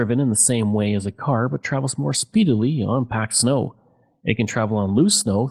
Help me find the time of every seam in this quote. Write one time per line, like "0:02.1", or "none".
none